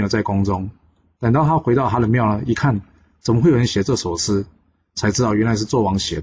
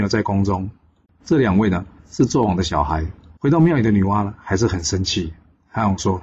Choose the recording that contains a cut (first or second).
second